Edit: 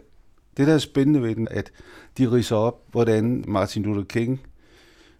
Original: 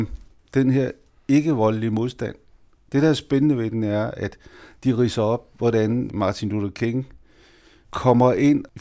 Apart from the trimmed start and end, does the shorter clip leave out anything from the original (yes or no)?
yes